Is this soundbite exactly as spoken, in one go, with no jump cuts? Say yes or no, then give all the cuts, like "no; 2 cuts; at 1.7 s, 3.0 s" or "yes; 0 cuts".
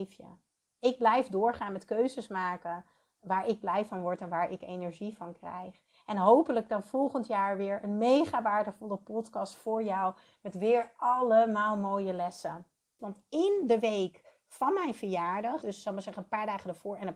no; 2 cuts; at 13.0 s, 15.6 s